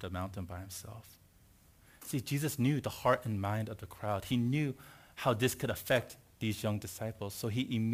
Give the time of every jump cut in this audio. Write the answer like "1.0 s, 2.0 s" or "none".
none